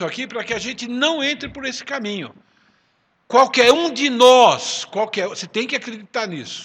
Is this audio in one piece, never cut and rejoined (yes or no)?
yes